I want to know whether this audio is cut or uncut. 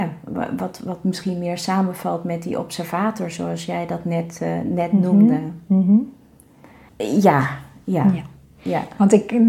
cut